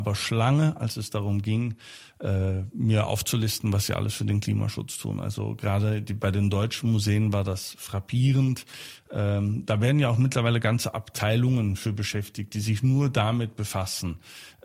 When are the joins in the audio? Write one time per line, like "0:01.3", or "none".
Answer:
none